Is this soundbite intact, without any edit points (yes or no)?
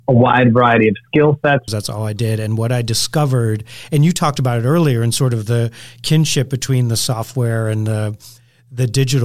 no